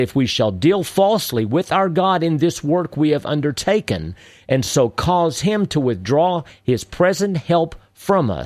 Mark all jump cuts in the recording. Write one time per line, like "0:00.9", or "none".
none